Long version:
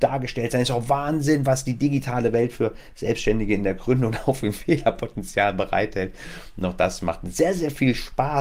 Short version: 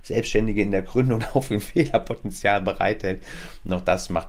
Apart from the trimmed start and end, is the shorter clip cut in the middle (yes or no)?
no